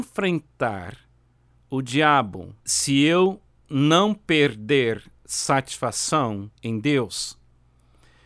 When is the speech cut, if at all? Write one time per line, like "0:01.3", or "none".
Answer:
0:02.6
0:06.6